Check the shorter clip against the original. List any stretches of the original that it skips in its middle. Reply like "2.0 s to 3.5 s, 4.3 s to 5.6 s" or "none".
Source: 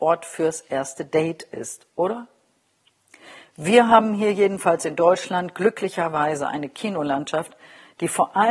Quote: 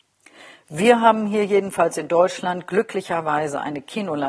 none